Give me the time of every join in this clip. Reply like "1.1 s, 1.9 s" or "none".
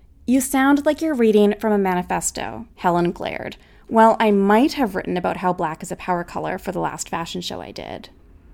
2.7 s